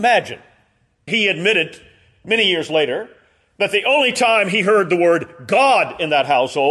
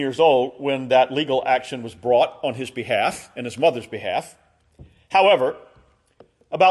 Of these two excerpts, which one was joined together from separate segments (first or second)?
first